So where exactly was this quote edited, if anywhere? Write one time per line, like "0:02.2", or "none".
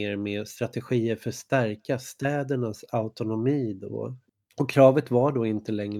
0:04.5

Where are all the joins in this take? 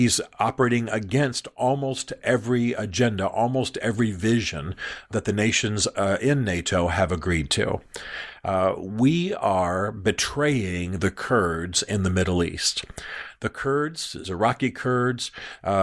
0:05.1
0:14.2

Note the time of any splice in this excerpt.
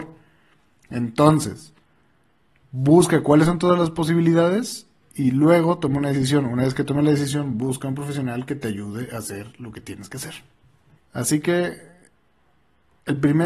0:11.0

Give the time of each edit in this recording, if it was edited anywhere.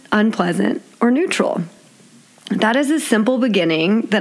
none

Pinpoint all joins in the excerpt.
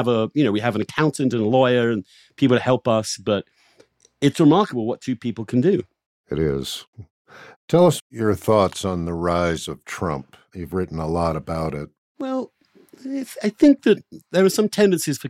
none

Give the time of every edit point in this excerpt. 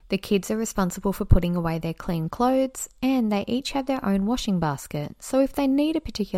none

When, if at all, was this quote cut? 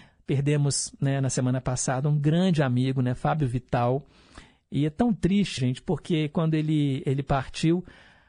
0:05.6

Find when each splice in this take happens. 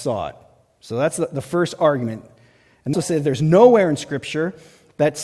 0:02.9

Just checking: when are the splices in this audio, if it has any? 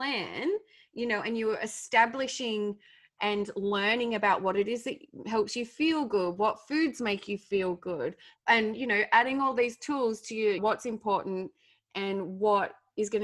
0:08.3
0:10.6

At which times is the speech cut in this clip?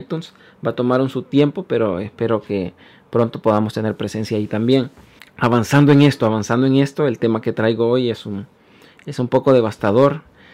none

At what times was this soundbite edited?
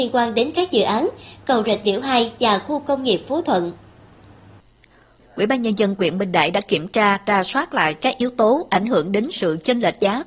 0:05.2

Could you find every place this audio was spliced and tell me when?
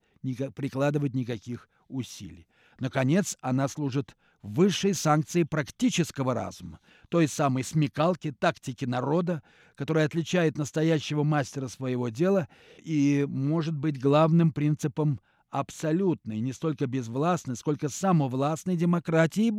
none

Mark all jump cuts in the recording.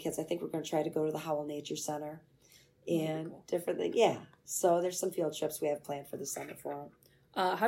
none

